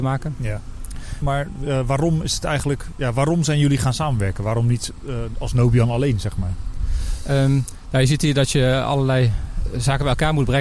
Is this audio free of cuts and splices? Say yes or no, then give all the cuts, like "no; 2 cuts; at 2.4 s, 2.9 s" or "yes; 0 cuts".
no; 1 cut; at 1.2 s